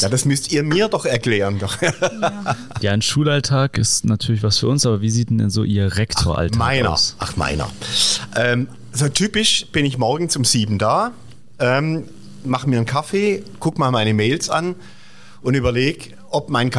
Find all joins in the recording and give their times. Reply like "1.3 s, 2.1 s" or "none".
none